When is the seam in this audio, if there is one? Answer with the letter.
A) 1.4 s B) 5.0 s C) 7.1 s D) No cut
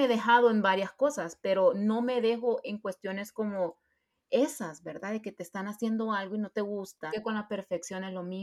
C